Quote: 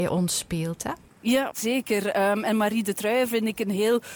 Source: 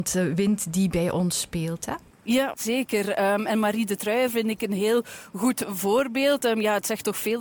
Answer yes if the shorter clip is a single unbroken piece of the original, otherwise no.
yes